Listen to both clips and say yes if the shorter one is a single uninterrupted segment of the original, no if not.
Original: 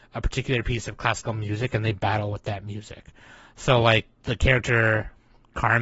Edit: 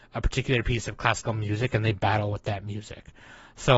yes